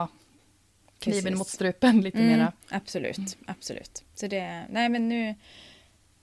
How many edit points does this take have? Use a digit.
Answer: 1